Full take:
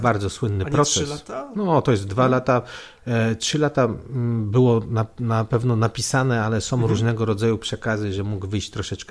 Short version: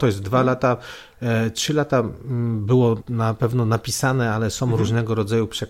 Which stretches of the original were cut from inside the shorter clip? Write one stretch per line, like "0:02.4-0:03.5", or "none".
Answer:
0:04.9-0:05.1